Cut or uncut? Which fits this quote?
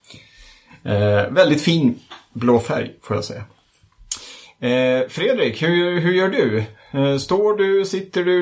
uncut